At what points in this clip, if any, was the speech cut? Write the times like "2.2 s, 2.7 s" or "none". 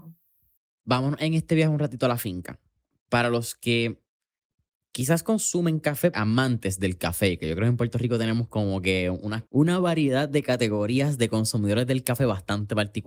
6.1 s, 9.5 s